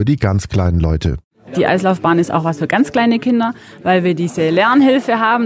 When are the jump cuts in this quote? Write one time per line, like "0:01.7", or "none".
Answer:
none